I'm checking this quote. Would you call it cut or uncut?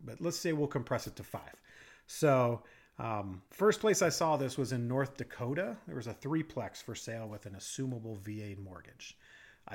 cut